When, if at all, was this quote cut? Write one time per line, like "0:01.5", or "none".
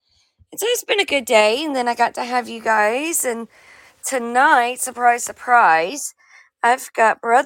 none